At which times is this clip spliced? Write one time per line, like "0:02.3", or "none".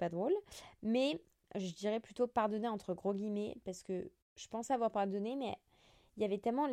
none